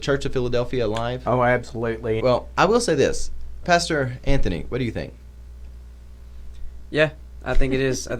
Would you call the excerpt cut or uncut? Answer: cut